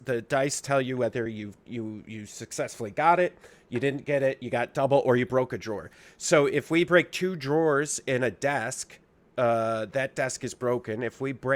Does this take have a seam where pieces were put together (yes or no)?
no